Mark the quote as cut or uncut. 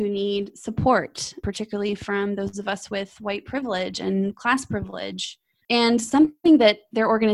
cut